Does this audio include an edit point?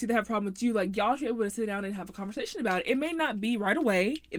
no; 0 cuts

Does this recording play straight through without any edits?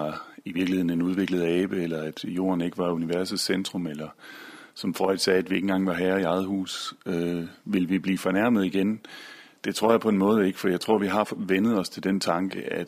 yes; 0 cuts

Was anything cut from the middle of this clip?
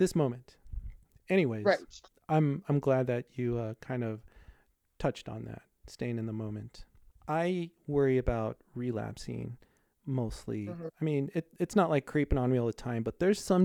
no; 0 cuts

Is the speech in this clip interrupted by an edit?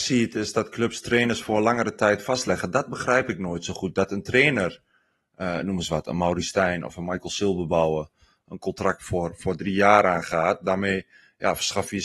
no; 0 cuts

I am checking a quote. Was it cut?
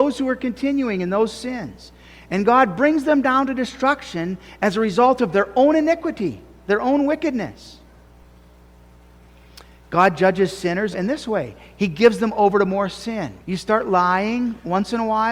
yes; 2 cuts; at 10.9 s, 13.4 s

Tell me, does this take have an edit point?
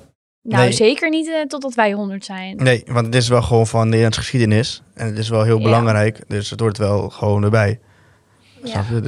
no; 0 cuts

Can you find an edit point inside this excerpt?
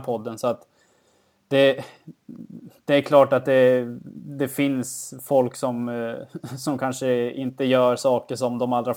no; 0 cuts

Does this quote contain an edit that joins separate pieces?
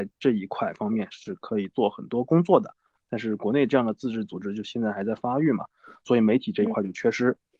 yes; 1 cut; at 3.0 s

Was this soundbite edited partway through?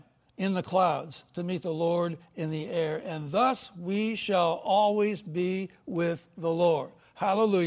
no; 0 cuts

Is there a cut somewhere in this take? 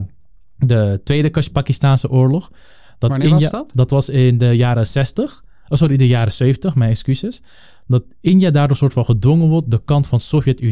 no; 0 cuts

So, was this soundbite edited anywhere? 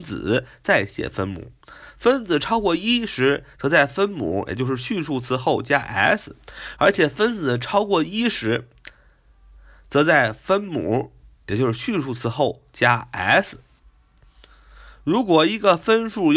yes; 1 cut; at 6.8 s

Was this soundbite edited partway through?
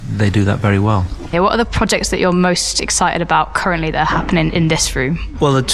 yes; 1 cut; at 1.3 s

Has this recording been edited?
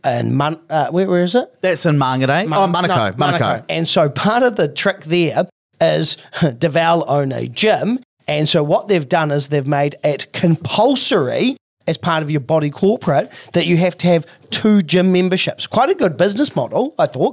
yes; 1 cut; at 3.6 s

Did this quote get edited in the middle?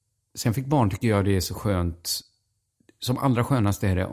no; 0 cuts

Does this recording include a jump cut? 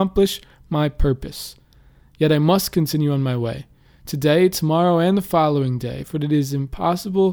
no; 0 cuts

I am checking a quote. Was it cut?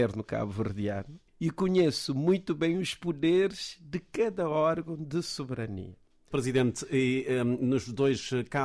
yes; 2 cuts; at 1.3 s, 6.3 s

